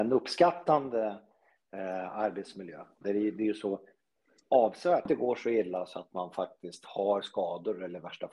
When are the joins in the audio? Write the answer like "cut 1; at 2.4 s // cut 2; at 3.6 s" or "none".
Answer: cut 1; at 3.0 s // cut 2; at 5.1 s